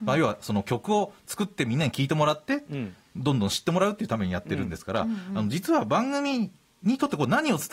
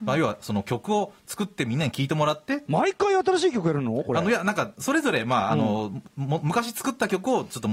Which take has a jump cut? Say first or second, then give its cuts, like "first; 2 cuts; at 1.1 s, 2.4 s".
second; 1 cut; at 2.7 s